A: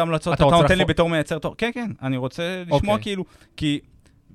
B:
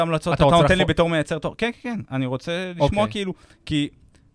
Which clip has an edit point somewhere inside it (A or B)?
A